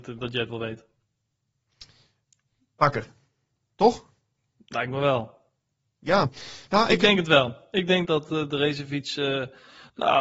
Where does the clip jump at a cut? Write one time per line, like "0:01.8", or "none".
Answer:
0:08.0